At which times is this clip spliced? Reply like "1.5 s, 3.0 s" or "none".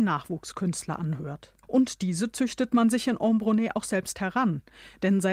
1.6 s